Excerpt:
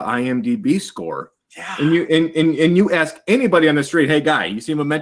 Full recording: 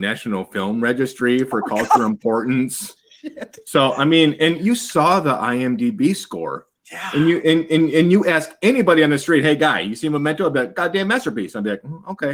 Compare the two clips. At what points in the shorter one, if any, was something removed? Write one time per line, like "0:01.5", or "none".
none